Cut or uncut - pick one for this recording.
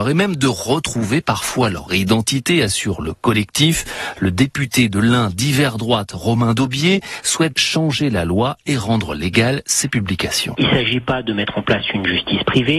cut